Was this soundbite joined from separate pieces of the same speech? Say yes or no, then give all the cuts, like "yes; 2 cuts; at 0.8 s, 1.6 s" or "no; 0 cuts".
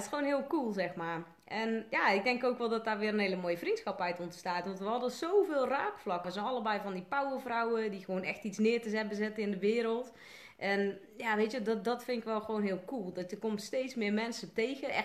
yes; 1 cut; at 6.2 s